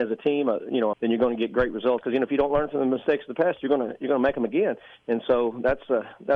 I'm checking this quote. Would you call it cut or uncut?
cut